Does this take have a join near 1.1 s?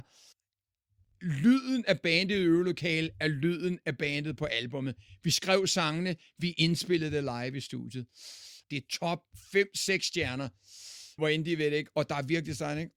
no; 2 cuts; at 8.6 s, 11.2 s

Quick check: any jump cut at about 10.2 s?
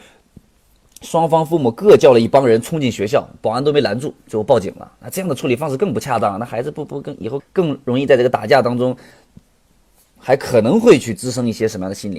yes; 2 cuts; at 7.4 s, 10.2 s

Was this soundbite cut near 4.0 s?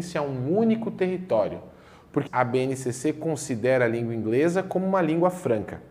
no; 1 cut; at 2.3 s

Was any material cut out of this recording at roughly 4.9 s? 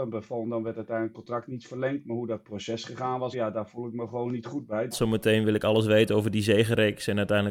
yes; 2 cuts; at 3.3 s, 4.9 s

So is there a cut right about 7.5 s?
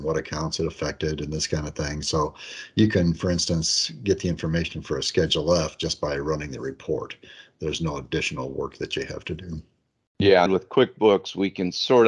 no; 1 cut; at 10.5 s

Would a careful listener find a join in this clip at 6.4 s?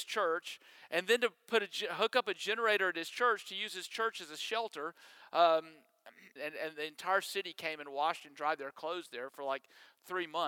yes; 1 cut; at 6.4 s

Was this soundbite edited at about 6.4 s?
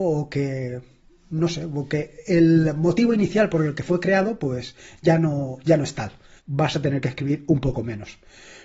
yes; 1 cut; at 6.4 s

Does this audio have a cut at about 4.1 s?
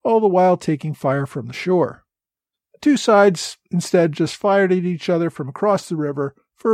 no; 1 cut; at 2.5 s

